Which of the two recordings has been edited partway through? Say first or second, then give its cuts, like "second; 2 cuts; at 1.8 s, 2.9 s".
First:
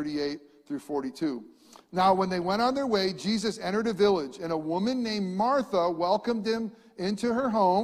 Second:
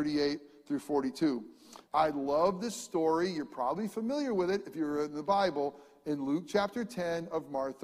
second; 1 cut; at 1.9 s